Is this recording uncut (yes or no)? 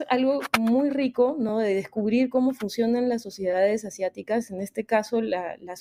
yes